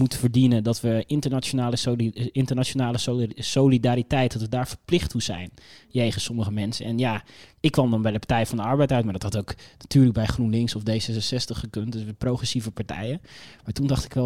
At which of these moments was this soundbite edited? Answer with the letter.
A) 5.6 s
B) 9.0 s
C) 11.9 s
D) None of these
D